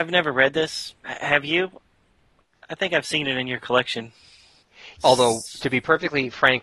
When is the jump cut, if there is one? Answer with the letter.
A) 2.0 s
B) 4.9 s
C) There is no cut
B